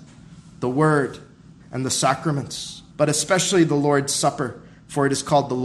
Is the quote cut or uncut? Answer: cut